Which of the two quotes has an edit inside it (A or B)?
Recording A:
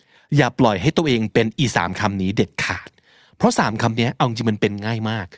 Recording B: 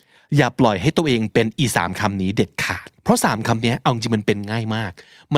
B